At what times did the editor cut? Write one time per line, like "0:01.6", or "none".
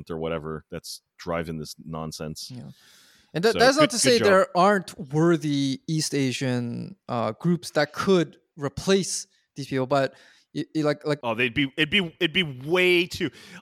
none

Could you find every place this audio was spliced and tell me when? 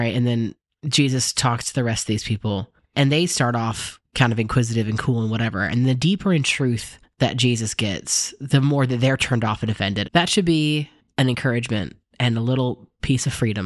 0:10.0

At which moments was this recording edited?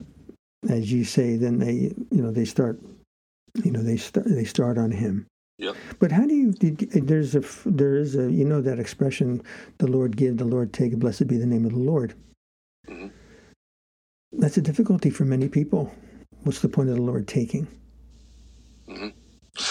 0:05.6

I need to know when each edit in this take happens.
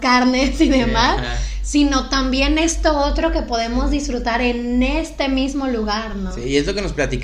none

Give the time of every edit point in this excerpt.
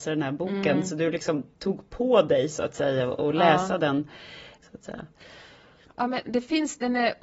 0:04.6

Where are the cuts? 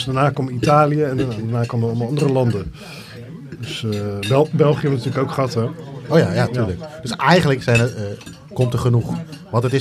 0:06.5

